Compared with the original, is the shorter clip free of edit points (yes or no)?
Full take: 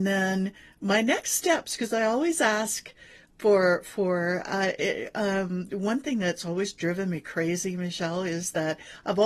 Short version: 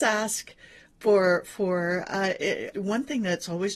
no